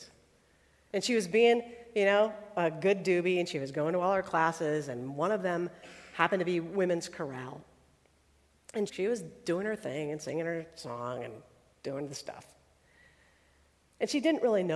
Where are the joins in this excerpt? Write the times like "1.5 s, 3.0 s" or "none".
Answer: 8.9 s